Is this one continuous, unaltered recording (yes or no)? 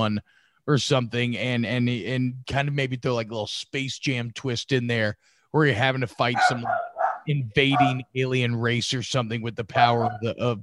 yes